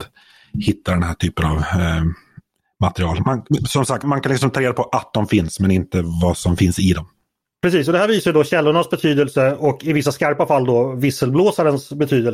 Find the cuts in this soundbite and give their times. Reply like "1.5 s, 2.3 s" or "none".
4.0 s